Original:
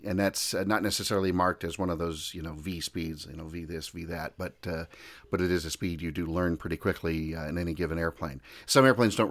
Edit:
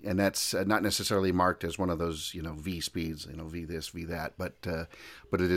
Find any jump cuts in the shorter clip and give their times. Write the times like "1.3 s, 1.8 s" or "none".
none